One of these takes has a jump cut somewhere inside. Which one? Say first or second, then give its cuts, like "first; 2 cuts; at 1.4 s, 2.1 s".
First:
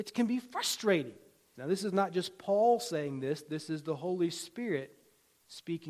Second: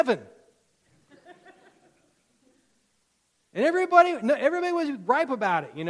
first; 1 cut; at 1.5 s